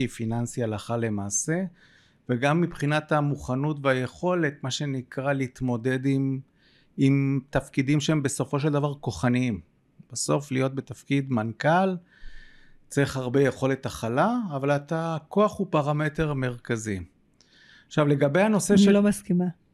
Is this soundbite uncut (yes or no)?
yes